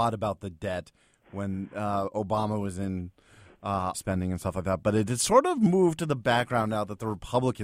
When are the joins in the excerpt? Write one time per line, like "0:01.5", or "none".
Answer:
0:03.9

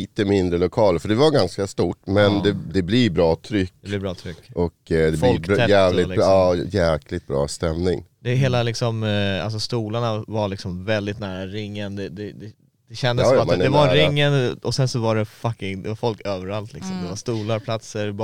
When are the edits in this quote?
none

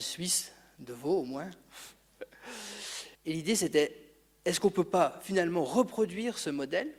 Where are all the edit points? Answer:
0:03.2

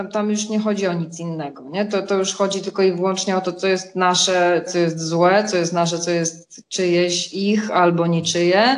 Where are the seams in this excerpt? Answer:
0:04.7

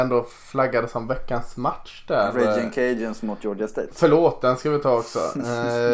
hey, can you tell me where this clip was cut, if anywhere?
none

